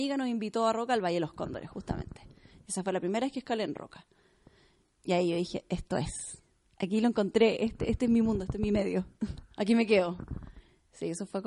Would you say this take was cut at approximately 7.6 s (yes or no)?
no